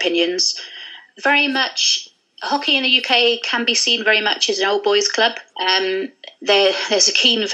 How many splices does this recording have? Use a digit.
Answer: 2